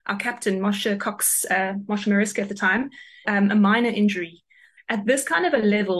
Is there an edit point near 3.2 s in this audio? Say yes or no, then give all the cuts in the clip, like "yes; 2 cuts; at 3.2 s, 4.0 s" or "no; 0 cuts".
yes; 2 cuts; at 3.2 s, 4.8 s